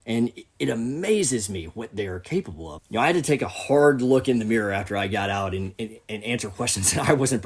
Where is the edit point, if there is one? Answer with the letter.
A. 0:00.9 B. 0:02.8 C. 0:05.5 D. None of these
B